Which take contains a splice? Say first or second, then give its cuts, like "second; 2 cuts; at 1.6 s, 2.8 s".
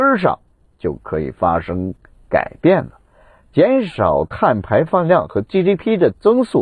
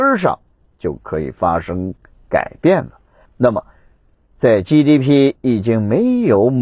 second; 1 cut; at 3.3 s